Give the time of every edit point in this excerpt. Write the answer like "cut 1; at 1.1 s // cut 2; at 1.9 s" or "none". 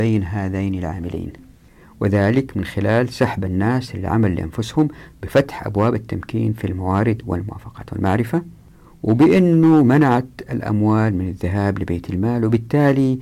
none